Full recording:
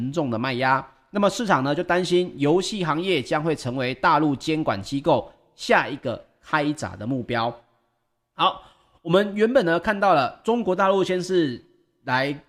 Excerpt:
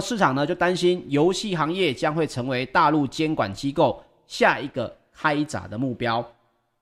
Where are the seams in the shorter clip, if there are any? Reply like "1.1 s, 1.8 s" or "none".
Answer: none

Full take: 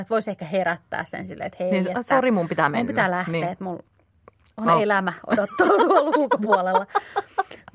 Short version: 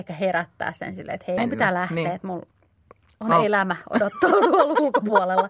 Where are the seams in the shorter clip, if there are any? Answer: 1.4 s

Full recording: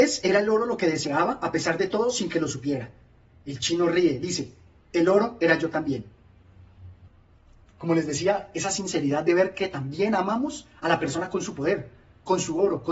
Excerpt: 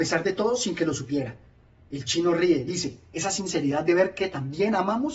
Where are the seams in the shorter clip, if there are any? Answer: 3.1 s

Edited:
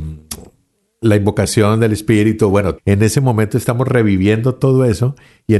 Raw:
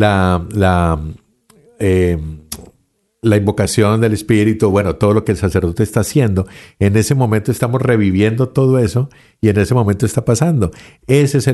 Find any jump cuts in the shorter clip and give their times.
2.8 s

